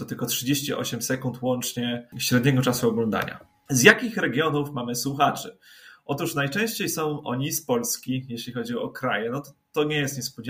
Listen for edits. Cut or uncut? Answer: uncut